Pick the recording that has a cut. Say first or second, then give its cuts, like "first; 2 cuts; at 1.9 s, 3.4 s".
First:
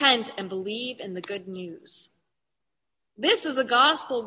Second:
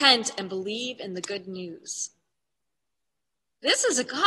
first; 1 cut; at 3.0 s